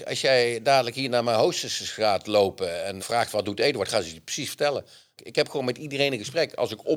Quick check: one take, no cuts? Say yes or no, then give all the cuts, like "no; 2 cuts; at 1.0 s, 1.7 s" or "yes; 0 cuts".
no; 2 cuts; at 3.0 s, 5.2 s